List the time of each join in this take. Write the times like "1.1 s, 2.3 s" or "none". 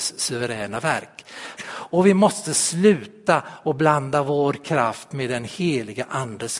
1.6 s